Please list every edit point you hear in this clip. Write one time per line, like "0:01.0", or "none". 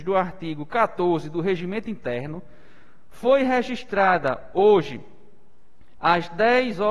0:06.0